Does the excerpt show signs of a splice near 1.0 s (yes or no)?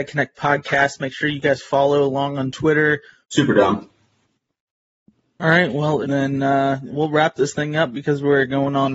no